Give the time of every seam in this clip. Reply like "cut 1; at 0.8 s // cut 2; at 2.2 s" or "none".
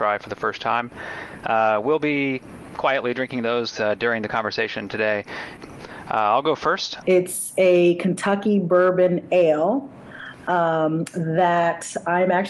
cut 1; at 5.6 s // cut 2; at 7.0 s